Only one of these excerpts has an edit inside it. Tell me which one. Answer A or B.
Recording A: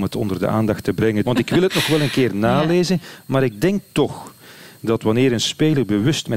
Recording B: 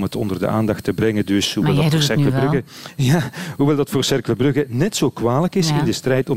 A